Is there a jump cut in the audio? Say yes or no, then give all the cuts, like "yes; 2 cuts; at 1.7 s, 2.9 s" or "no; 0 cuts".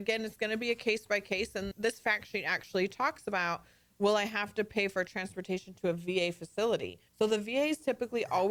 yes; 2 cuts; at 1.7 s, 7.1 s